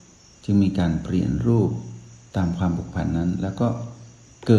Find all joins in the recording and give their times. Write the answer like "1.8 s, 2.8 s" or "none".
none